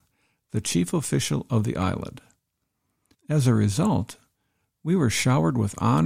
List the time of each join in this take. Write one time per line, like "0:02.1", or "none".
0:03.1